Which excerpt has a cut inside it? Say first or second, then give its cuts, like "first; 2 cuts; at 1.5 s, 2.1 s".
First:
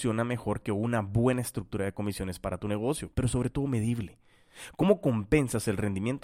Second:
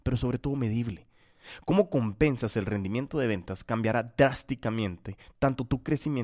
first; 1 cut; at 3.1 s